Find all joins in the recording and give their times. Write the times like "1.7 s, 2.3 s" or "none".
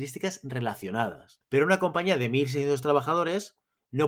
1.4 s